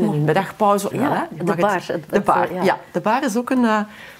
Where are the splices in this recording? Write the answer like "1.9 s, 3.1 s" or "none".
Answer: 0.9 s